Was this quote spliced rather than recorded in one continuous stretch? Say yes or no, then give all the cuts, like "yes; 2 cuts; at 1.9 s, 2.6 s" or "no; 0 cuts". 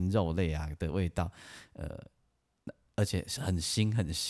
no; 0 cuts